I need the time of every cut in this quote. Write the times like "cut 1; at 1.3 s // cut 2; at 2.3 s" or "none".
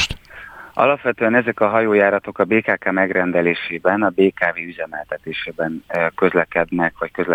none

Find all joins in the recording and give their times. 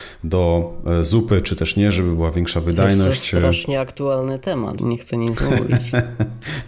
cut 1; at 4.8 s

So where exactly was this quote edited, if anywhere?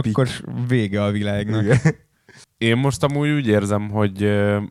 cut 1; at 2.4 s

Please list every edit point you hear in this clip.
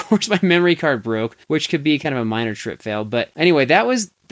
cut 1; at 1.4 s

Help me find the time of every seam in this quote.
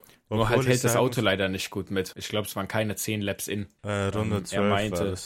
cut 1; at 2.1 s // cut 2; at 3.8 s

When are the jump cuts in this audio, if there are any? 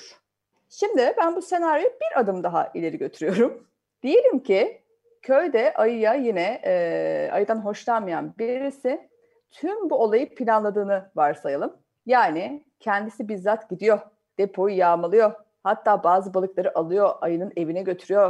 none

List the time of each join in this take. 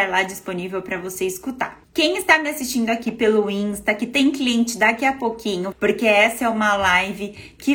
cut 1; at 1.8 s // cut 2; at 5.7 s

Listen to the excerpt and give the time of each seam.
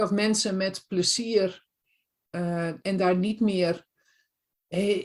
cut 1; at 2.8 s

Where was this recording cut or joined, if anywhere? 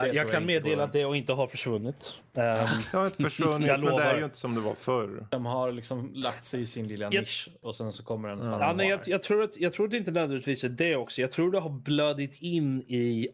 none

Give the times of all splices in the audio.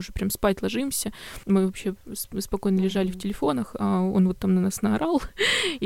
cut 1; at 1.4 s

